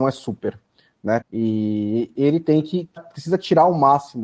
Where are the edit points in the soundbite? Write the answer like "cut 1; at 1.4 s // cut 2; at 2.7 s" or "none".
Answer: cut 1; at 1.2 s // cut 2; at 3.0 s